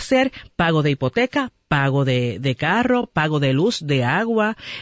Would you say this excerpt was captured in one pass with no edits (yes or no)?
yes